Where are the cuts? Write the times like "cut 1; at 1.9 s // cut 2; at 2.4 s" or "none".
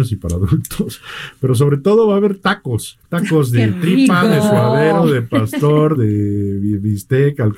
cut 1; at 3.0 s // cut 2; at 5.9 s